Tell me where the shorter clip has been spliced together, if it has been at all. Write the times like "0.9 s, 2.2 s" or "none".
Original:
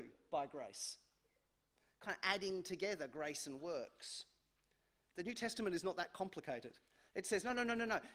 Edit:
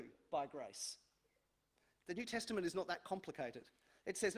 1.9 s